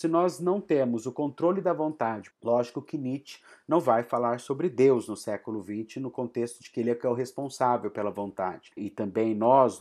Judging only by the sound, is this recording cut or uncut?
cut